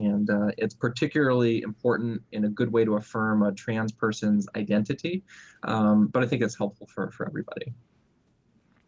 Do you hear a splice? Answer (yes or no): no